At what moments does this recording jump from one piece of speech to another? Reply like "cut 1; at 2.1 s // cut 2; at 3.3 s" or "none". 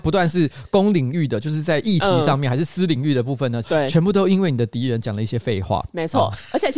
cut 1; at 3.6 s